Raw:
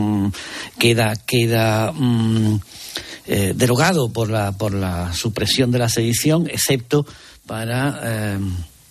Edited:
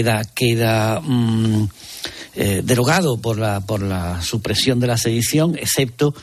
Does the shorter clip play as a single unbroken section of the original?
yes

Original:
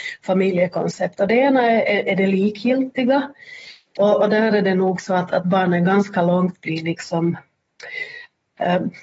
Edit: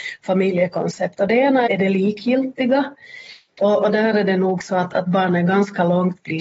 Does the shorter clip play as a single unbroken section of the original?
no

